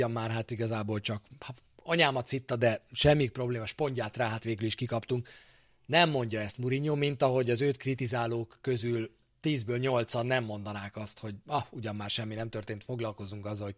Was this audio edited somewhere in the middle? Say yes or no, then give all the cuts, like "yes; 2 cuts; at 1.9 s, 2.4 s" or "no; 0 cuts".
no; 0 cuts